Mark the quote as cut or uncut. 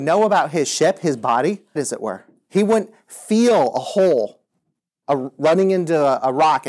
cut